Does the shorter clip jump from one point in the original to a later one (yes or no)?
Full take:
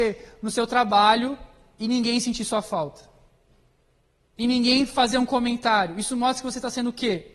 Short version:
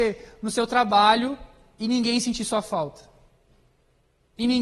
no